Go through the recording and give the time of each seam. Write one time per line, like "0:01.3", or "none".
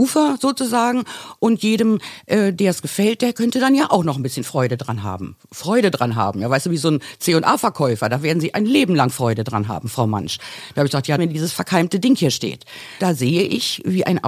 0:11.2
0:13.0